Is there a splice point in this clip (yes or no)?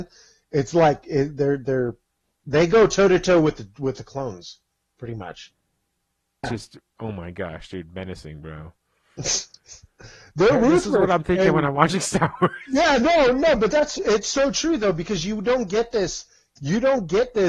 yes